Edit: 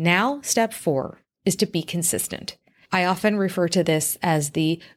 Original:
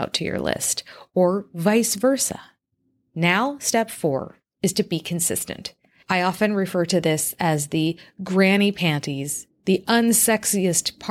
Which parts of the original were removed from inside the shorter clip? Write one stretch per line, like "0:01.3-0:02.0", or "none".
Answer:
none